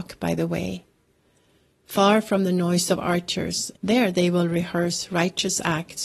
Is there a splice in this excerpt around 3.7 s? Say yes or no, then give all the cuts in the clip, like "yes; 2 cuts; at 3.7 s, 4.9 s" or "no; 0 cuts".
yes; 1 cut; at 3.7 s